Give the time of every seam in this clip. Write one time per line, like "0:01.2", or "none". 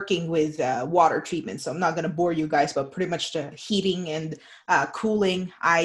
none

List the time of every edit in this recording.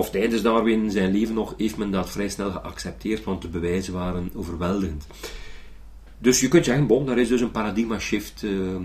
none

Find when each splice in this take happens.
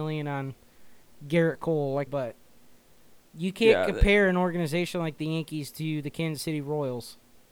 0:02.1

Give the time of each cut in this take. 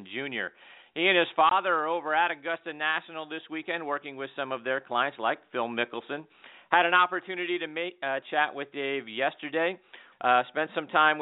0:08.2
0:10.1

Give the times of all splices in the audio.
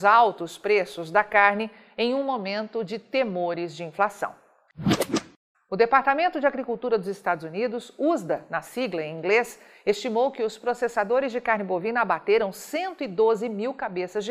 0:05.5

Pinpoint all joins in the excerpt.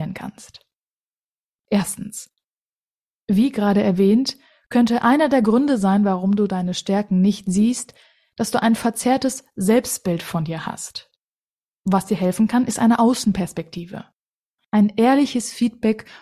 none

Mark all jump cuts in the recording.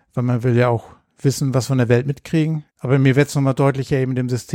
0:02.7

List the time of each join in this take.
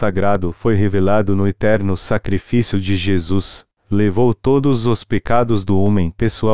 0:03.8

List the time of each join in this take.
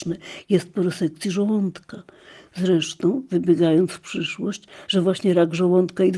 0:04.9

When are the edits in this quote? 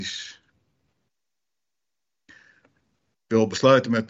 none

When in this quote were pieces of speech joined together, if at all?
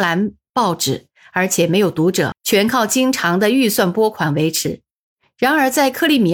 0:02.3

